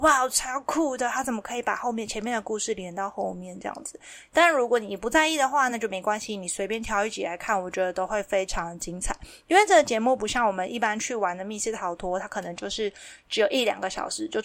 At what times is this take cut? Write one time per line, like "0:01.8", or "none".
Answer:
none